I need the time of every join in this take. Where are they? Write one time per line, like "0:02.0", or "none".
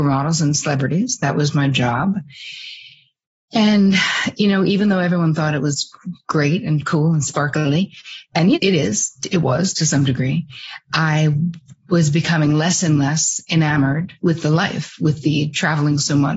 0:08.5
0:14.2